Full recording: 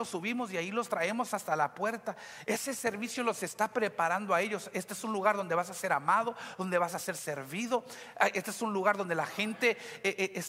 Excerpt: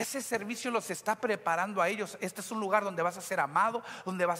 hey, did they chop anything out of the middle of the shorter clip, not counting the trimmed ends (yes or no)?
no